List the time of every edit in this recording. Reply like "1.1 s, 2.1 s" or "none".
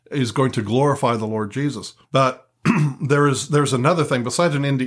2.0 s